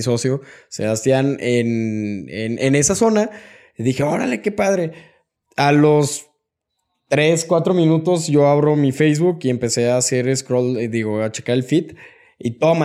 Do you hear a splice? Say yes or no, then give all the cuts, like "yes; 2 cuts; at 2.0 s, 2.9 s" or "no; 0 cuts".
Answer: no; 0 cuts